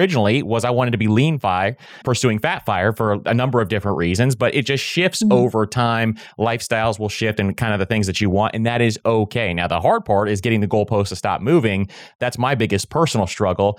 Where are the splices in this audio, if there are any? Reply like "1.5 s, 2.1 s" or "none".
2.0 s